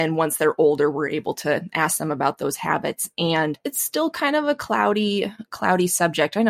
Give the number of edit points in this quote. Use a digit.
0